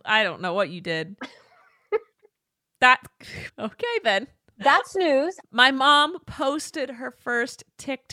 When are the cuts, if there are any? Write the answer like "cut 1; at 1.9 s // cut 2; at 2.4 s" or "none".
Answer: cut 1; at 3.5 s // cut 2; at 5.4 s